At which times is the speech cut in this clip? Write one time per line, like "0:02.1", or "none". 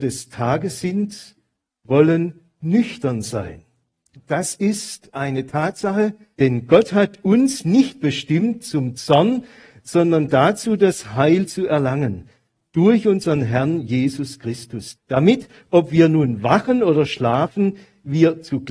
0:04.2
0:06.3
0:15.0